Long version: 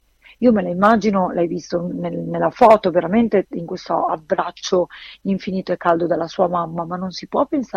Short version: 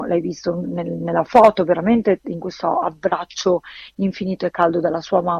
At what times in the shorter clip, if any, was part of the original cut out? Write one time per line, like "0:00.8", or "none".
none